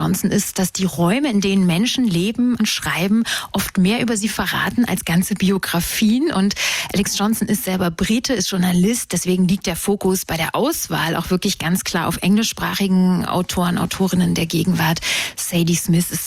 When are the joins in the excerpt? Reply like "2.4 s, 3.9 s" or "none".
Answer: 2.6 s

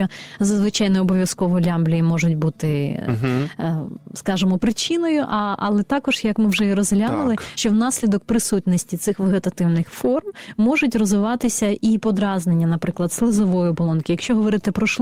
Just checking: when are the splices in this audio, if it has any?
none

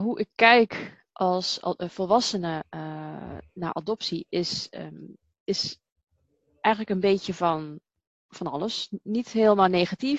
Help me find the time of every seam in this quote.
none

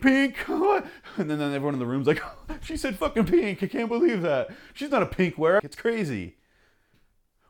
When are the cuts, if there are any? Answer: 5.6 s

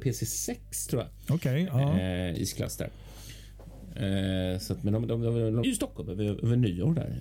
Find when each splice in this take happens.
5.6 s

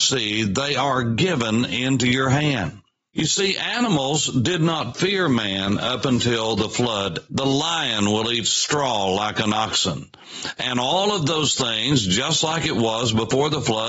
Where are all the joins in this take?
7.3 s

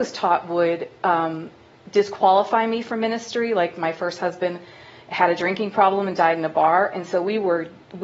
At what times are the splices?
none

